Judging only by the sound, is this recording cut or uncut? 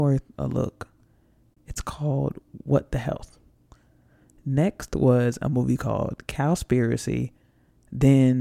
uncut